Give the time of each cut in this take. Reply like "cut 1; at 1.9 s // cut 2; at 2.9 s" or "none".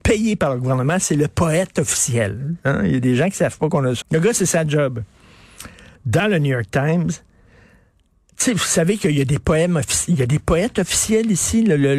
cut 1; at 4.0 s // cut 2; at 6.0 s